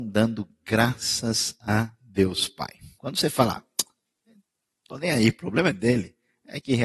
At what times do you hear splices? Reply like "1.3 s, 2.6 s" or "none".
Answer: 3.0 s